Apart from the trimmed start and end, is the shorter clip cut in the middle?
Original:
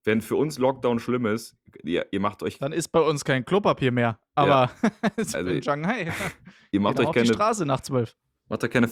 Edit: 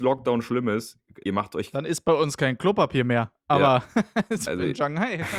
yes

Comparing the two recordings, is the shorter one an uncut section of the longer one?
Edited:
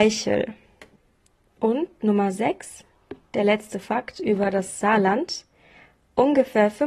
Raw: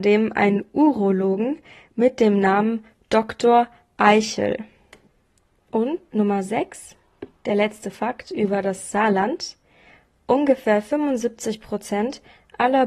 yes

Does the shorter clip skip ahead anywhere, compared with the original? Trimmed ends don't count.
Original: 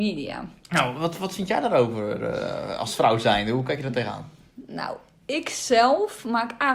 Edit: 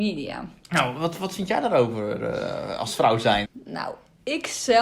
yes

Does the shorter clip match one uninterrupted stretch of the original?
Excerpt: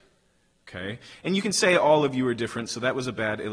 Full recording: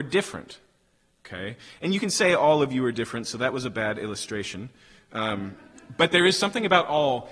yes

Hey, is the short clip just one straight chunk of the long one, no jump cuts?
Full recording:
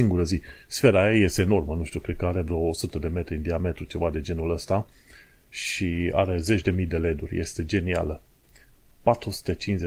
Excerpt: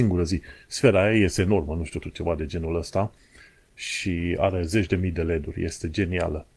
no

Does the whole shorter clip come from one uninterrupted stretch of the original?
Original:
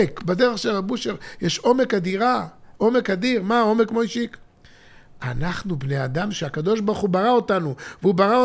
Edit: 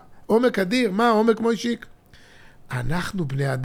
yes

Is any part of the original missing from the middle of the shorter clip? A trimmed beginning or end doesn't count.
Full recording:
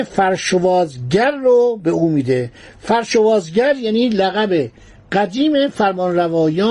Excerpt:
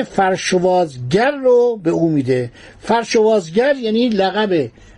no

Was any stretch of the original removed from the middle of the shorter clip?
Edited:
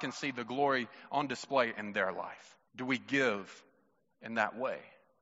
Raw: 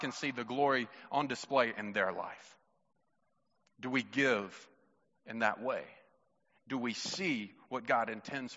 yes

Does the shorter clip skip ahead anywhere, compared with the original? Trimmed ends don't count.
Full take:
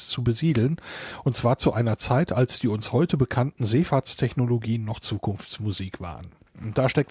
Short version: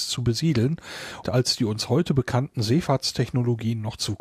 yes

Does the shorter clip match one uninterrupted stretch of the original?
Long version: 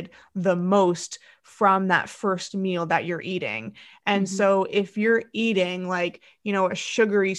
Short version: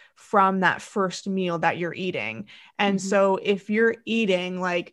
yes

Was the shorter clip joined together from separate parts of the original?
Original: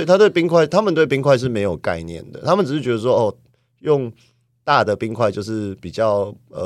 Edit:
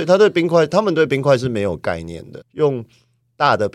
yes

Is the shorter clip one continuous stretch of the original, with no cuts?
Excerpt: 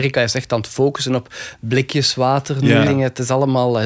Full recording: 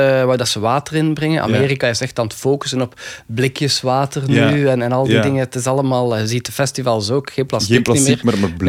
no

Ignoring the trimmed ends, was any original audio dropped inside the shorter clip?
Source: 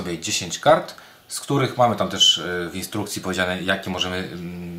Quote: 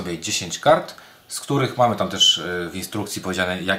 no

